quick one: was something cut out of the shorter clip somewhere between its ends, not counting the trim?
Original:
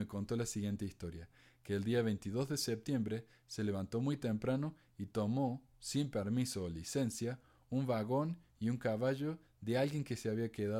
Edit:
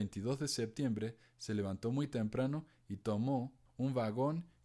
yes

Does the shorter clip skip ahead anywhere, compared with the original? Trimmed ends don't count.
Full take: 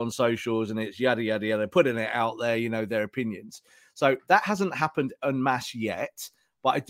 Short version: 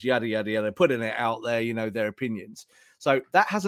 no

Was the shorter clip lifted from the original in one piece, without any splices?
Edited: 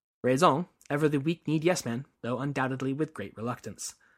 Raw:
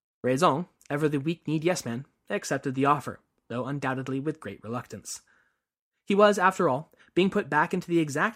no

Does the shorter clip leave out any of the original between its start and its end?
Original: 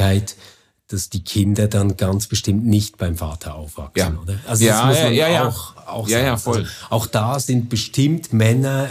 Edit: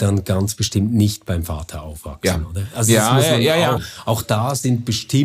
yes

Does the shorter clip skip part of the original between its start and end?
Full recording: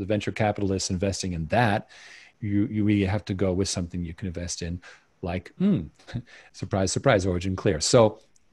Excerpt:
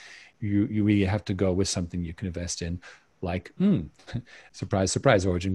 no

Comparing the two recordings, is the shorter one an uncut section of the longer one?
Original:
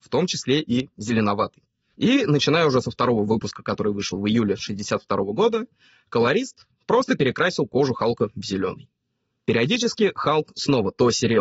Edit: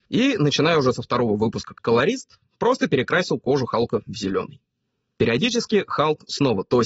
no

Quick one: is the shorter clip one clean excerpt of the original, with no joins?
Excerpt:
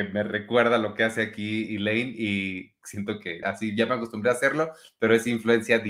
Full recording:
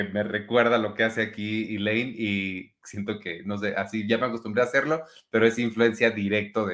no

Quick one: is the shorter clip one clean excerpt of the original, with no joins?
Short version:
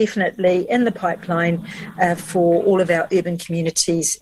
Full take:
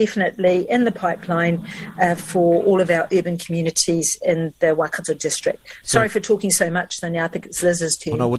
yes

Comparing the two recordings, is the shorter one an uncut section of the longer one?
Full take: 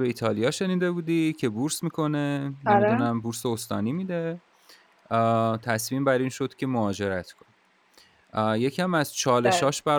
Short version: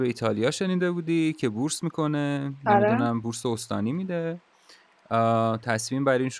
yes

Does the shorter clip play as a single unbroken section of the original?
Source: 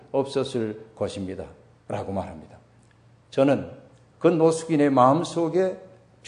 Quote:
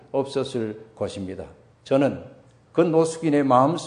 no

